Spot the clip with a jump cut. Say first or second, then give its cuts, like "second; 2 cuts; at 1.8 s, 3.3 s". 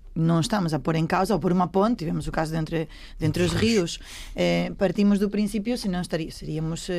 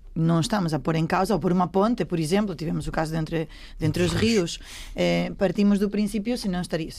first; 1 cut; at 2.0 s